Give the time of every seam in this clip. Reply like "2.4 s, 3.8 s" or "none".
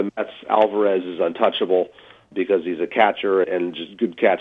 2.3 s, 3.4 s